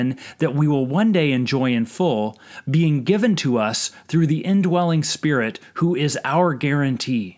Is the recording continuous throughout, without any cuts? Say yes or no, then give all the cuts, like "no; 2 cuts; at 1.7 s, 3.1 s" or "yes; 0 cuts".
yes; 0 cuts